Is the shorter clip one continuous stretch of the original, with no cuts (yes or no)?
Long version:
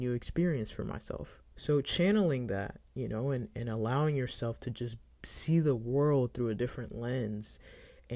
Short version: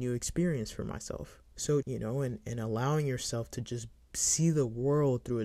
no